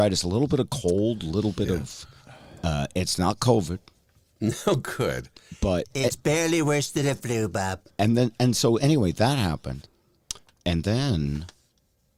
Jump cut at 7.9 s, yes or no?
yes